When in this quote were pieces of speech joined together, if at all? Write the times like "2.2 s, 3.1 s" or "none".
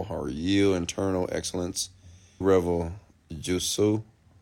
2.4 s